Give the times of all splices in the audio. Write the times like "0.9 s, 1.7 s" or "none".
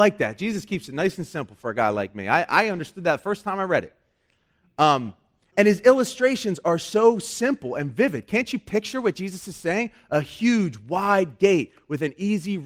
none